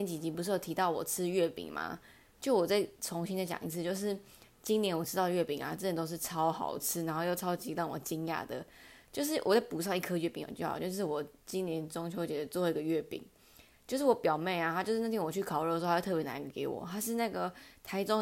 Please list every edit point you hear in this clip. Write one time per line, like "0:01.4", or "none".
none